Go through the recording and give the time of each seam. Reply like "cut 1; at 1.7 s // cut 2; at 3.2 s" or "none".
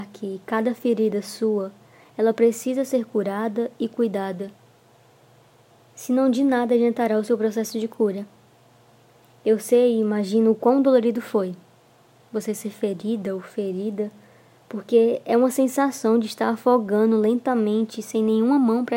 none